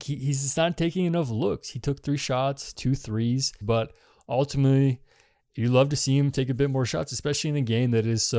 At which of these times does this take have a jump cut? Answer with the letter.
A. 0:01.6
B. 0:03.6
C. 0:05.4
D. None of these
B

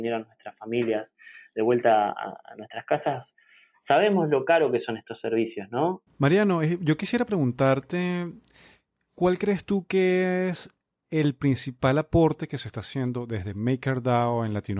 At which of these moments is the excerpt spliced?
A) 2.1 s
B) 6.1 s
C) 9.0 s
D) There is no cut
B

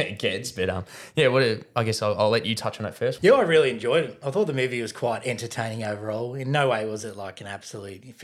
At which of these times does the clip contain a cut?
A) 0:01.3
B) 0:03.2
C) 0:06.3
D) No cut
B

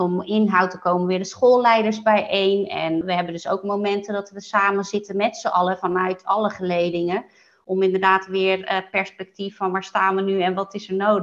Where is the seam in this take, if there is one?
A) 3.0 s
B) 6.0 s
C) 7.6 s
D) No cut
A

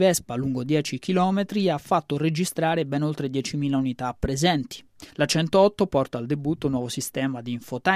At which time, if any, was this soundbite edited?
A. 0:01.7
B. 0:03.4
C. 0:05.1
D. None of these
C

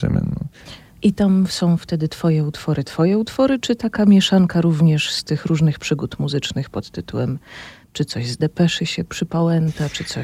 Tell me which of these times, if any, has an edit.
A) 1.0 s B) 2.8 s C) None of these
A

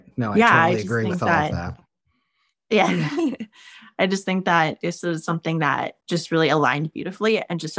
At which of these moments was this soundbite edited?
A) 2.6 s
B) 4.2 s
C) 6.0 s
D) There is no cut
C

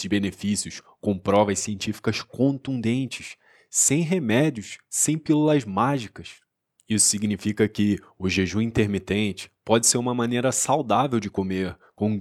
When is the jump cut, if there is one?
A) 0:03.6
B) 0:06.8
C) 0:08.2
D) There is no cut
B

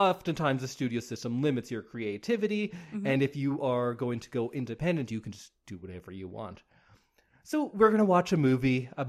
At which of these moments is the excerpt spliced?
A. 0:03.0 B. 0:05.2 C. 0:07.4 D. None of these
D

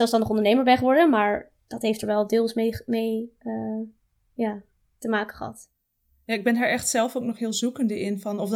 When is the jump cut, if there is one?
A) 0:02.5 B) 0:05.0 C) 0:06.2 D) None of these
B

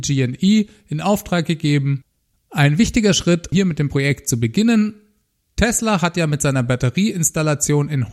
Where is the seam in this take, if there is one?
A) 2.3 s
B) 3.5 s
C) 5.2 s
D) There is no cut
B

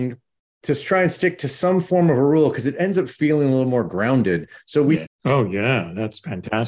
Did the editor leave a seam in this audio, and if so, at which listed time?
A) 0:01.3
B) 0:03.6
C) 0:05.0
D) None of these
C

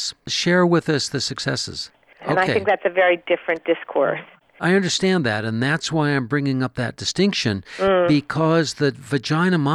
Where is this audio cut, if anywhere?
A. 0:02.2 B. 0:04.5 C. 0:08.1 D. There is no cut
A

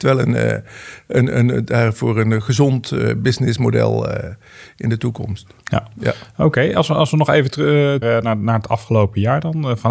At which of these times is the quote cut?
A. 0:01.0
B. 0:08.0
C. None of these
B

